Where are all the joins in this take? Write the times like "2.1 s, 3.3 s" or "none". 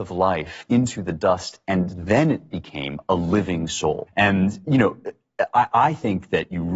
4.1 s